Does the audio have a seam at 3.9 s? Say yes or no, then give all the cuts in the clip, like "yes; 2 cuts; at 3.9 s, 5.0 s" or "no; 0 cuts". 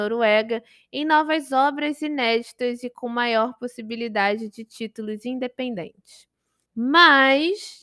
no; 1 cut; at 6.7 s